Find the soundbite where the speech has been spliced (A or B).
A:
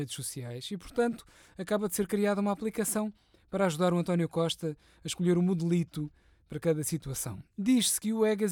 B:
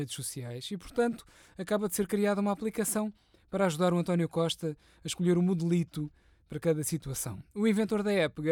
A